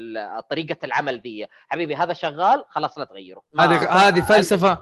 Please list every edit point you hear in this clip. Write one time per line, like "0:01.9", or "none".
0:03.5